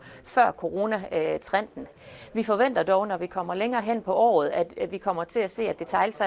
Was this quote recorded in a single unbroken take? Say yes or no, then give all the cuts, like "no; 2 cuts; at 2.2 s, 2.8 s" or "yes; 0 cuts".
yes; 0 cuts